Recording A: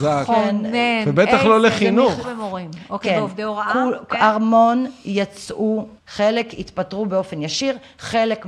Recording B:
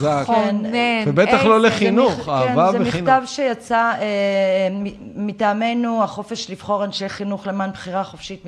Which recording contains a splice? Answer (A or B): A